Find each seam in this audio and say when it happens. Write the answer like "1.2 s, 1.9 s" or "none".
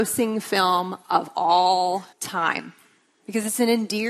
2.1 s